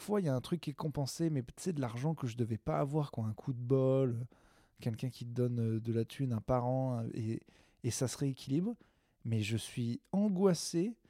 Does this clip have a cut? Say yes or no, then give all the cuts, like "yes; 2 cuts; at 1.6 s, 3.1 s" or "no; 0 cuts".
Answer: no; 0 cuts